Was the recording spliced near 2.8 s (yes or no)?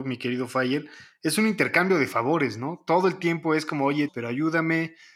no